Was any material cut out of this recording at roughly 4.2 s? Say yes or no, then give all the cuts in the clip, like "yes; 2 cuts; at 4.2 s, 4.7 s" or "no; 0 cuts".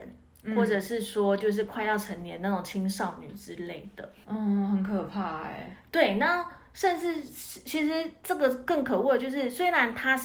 yes; 1 cut; at 4.2 s